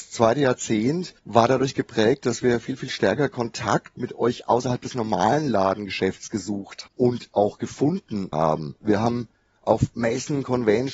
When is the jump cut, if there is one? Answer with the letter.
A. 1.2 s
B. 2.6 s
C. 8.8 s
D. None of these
A